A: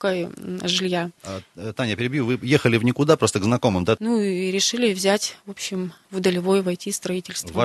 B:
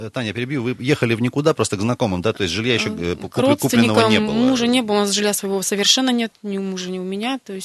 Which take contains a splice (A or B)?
A